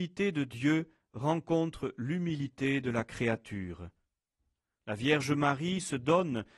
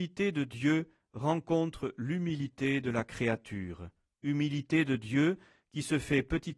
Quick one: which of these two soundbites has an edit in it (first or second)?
second